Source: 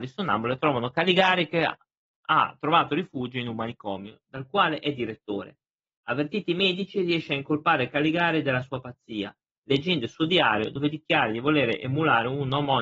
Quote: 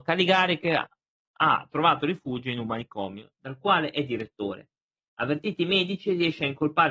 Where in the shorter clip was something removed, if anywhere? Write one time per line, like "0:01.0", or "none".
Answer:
none